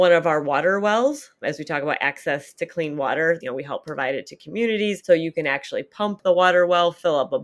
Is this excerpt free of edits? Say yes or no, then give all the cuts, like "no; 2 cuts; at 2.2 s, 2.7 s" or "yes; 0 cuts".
no; 1 cut; at 3.4 s